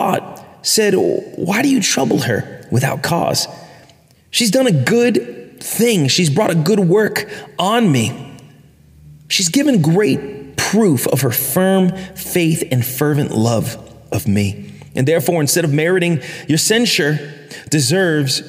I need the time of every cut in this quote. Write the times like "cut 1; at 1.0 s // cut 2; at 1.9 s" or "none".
none